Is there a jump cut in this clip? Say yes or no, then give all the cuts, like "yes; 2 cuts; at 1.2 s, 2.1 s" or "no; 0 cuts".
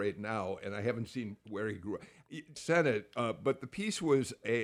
yes; 1 cut; at 2.6 s